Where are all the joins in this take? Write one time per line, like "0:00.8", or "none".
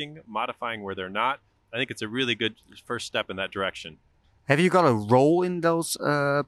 none